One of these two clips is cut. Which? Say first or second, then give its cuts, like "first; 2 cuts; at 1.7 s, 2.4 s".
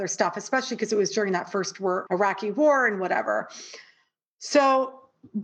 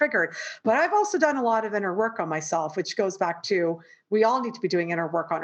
first; 1 cut; at 2.1 s